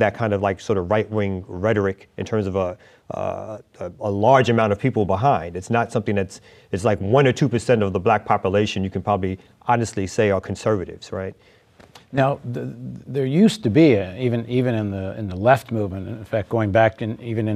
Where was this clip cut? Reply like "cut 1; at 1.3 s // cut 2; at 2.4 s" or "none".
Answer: none